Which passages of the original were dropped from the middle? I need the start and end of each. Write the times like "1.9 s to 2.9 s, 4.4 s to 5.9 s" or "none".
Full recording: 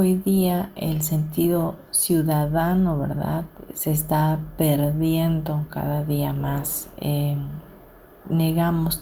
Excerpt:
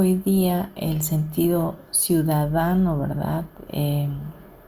3.7 s to 7.0 s